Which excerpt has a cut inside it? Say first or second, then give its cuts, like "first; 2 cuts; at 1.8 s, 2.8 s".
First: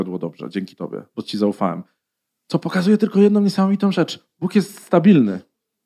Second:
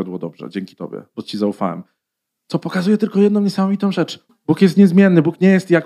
second; 1 cut; at 4.3 s